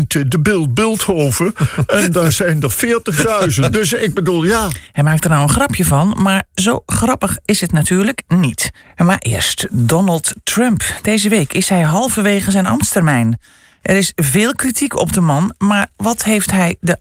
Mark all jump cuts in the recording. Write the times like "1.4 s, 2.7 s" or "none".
none